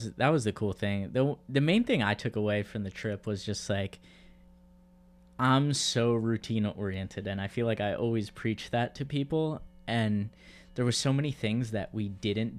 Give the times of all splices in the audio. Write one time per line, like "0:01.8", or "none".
none